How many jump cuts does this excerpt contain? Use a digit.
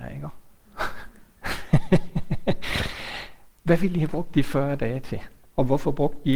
0